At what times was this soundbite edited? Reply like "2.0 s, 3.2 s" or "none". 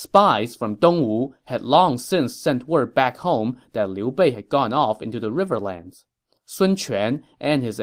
none